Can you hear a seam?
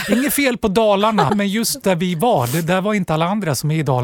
yes; 1 cut; at 1.3 s

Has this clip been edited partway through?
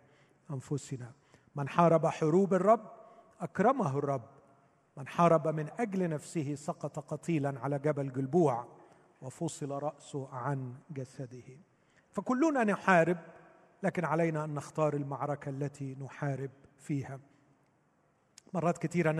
no; 0 cuts

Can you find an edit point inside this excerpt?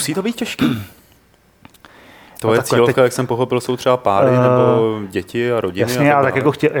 no; 0 cuts

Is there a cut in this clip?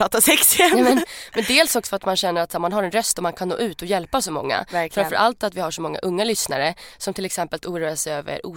no; 0 cuts

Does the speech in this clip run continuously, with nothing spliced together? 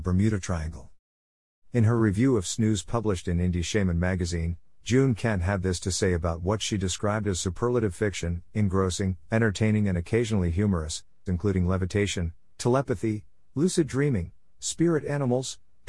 no; 1 cut; at 11.3 s

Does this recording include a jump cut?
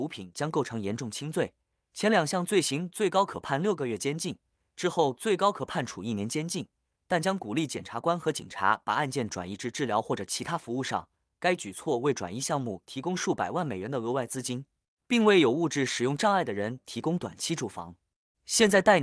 no; 0 cuts

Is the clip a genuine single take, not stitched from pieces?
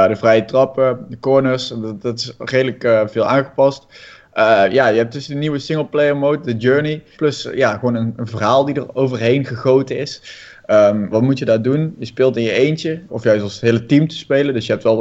no; 3 cuts; at 7.1 s, 11.1 s, 13.1 s

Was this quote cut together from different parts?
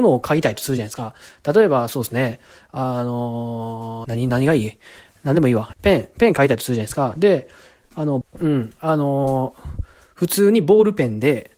yes; 3 cuts; at 4.0 s, 5.7 s, 8.2 s

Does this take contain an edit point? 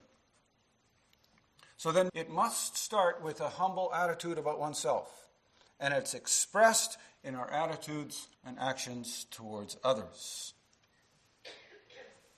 yes; 3 cuts; at 2.1 s, 5.7 s, 8.3 s

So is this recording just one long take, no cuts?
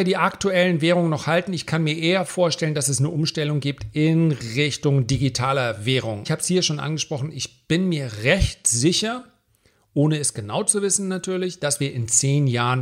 no; 1 cut; at 6.2 s

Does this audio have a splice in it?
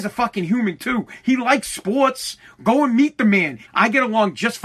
yes; 1 cut; at 3.6 s

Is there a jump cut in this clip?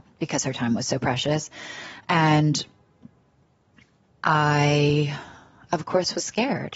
no; 0 cuts

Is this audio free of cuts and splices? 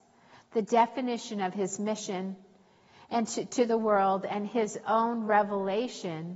yes; 0 cuts

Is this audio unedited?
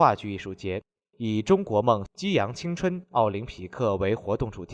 no; 1 cut; at 2.1 s

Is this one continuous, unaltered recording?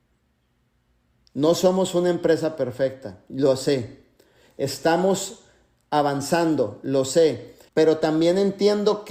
no; 1 cut; at 7.7 s

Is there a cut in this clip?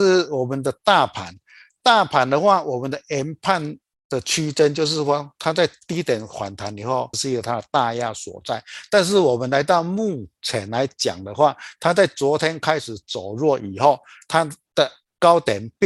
yes; 1 cut; at 7.1 s

